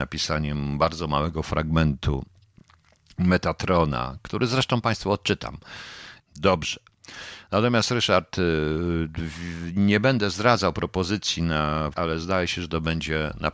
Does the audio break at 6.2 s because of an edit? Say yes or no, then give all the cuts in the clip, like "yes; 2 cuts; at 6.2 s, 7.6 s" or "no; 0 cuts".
yes; 2 cuts; at 6.2 s, 11.9 s